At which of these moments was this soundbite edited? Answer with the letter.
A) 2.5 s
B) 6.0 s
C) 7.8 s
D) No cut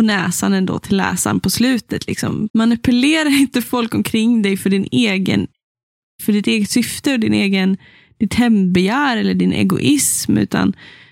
A